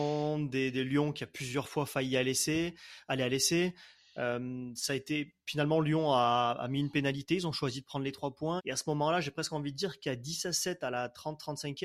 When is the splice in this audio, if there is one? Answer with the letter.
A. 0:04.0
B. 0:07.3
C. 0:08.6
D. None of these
C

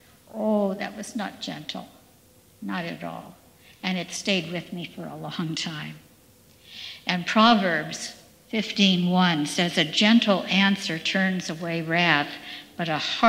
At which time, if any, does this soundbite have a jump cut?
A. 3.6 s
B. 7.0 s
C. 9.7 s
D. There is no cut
D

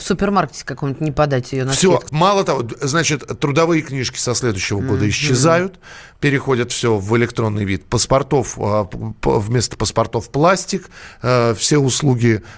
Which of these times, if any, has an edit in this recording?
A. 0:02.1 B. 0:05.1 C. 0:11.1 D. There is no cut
A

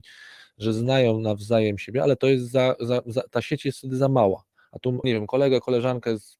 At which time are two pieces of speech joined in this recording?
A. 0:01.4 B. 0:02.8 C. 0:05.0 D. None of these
C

